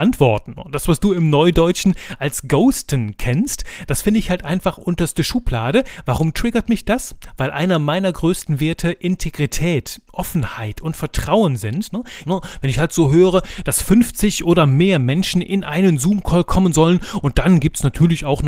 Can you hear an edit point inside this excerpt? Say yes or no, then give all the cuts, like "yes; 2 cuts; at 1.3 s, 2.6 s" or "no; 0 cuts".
yes; 1 cut; at 12.2 s